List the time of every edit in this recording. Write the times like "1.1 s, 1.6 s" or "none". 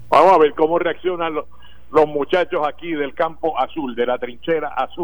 none